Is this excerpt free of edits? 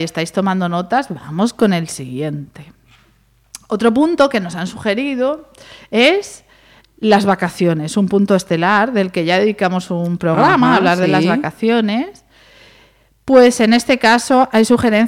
yes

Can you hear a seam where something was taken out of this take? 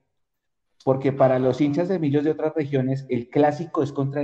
no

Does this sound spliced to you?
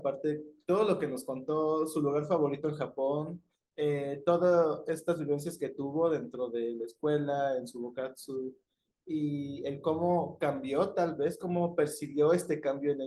no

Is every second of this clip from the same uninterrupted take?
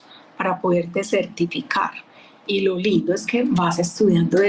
yes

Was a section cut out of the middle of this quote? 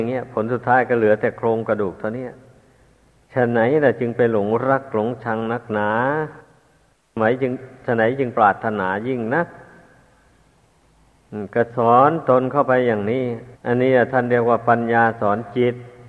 yes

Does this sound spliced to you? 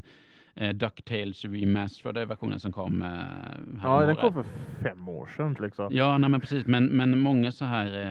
yes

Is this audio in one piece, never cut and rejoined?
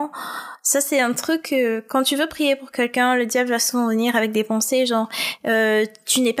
yes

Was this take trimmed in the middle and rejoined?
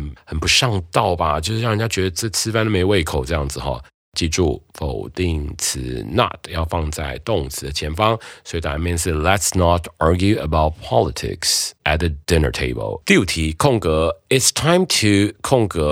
yes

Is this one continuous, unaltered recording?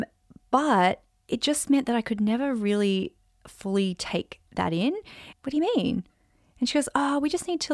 no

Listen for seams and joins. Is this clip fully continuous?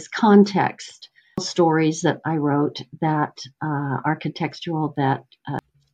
yes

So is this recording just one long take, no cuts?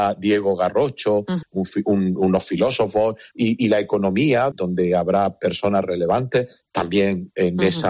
no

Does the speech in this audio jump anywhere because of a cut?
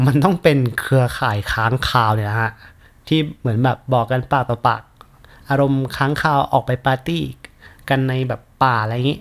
no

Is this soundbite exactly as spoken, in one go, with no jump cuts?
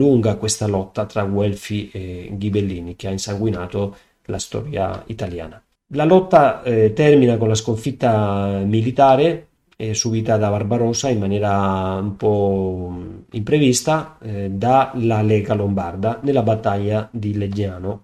yes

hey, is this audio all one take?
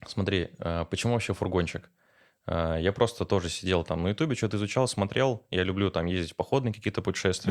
yes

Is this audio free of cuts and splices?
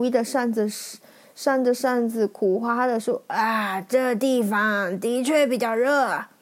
yes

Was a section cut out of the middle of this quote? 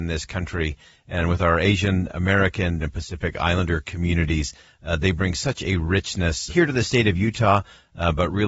yes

